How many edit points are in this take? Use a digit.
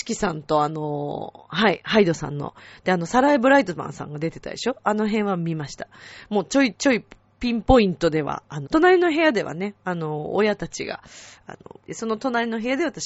2